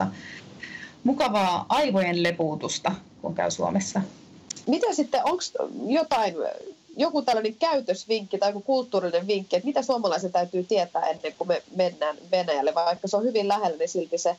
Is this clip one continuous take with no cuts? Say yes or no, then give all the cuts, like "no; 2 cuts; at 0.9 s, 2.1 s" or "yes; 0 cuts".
no; 1 cut; at 4.6 s